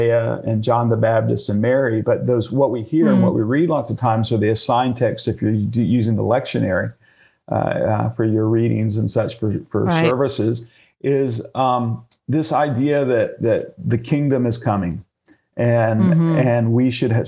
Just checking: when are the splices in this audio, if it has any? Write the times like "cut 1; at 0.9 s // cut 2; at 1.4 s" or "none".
none